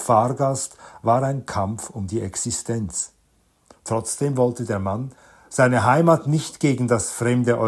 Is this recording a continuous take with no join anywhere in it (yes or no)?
yes